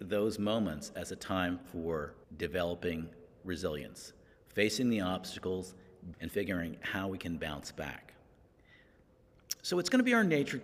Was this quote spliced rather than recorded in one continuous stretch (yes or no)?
yes